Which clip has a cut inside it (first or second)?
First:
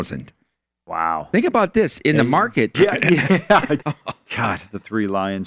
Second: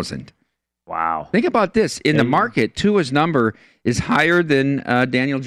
first